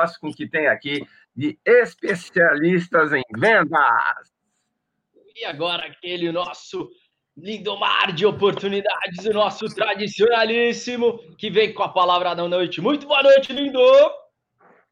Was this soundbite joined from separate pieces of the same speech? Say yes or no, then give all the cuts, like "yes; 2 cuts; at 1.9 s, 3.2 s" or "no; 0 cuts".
no; 0 cuts